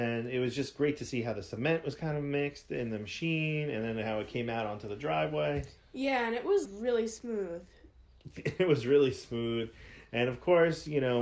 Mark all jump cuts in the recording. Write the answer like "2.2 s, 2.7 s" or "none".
6.6 s

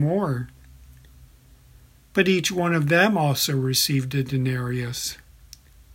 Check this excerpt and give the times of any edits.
none

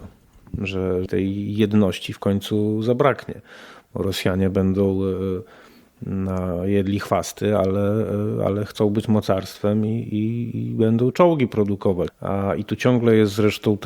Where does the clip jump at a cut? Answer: 1.1 s, 12.1 s

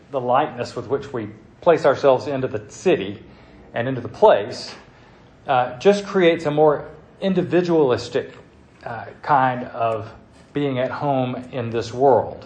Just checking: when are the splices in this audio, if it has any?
none

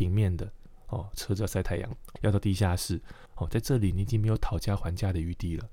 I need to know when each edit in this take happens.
2.2 s, 3.3 s

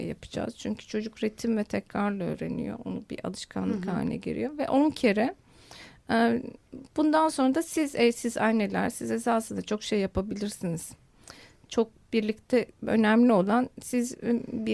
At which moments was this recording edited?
none

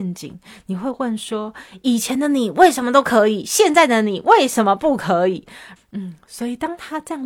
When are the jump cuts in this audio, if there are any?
5.8 s

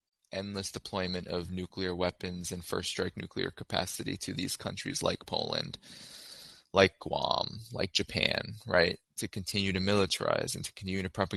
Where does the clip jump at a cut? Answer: none

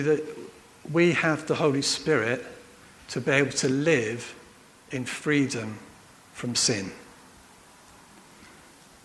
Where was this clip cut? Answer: none

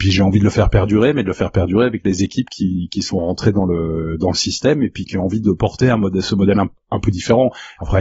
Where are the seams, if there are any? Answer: none

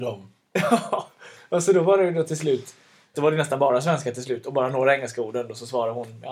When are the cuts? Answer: 3.1 s

